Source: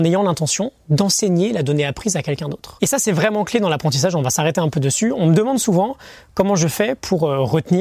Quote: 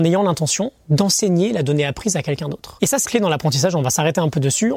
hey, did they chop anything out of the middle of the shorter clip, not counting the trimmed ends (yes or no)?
yes